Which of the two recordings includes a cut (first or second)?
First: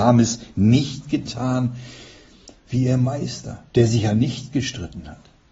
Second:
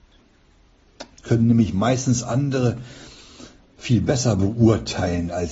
first